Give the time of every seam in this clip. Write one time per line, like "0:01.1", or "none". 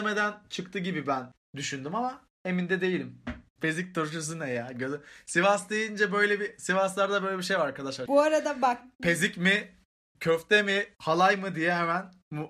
0:03.6
0:08.1